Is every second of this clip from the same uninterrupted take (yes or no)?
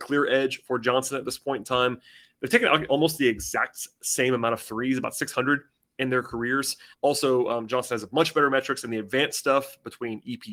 no